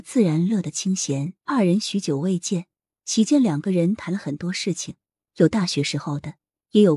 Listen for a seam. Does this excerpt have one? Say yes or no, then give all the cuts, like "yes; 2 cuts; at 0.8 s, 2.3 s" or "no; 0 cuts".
yes; 1 cut; at 1.4 s